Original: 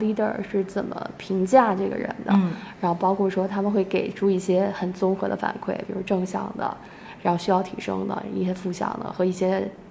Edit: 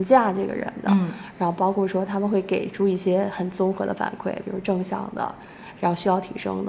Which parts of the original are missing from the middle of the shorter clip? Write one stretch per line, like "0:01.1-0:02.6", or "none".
none